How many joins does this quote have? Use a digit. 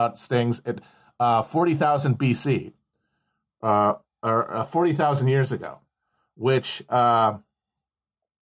0